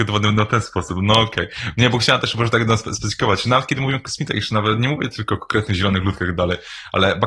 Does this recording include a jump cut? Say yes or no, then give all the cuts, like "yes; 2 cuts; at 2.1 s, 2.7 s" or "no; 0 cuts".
no; 0 cuts